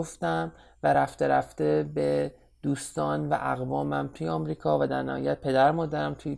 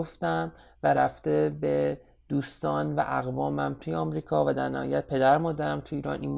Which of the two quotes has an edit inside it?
second; 1 cut; at 0.9 s

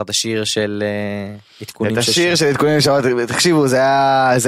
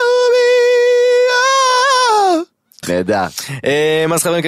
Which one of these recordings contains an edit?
second; 1 cut; at 2.8 s

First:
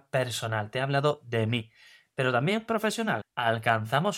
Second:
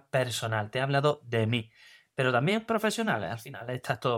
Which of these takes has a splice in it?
first; 1 cut; at 3.2 s

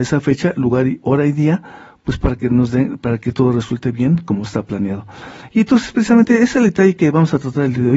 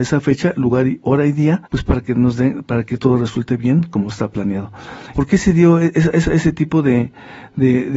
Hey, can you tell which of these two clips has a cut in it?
second; 2 cuts; at 1.7 s, 5.1 s

